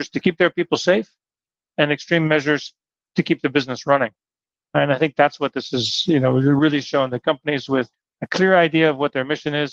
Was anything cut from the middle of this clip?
no; 0 cuts

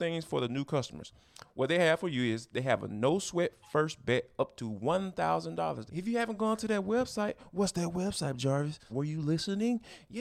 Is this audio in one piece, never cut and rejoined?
no; 2 cuts; at 5.9 s, 8.9 s

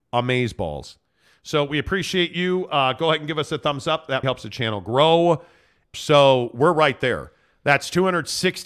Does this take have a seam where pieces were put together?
yes; 2 cuts; at 4.2 s, 5.9 s

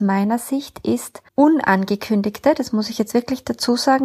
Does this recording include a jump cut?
yes; 1 cut; at 1.3 s

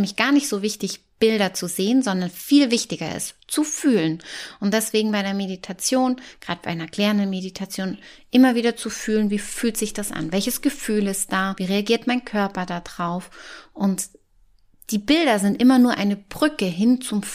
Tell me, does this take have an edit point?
no; 0 cuts

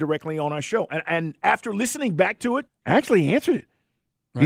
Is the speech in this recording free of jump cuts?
no; 1 cut; at 2.7 s

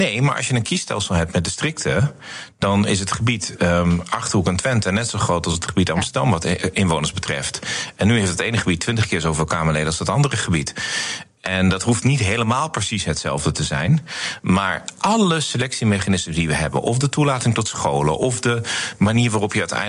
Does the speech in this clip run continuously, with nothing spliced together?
yes; 0 cuts

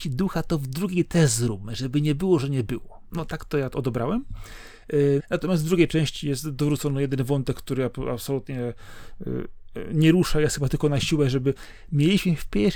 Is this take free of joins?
no; 1 cut; at 5.2 s

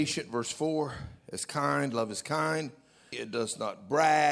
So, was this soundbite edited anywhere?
yes; 1 cut; at 3.1 s

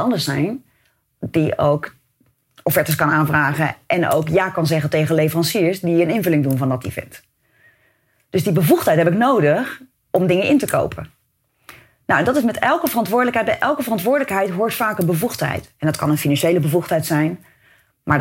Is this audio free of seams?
yes; 0 cuts

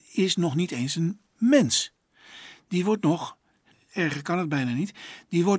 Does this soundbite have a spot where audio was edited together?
yes; 1 cut; at 3.7 s

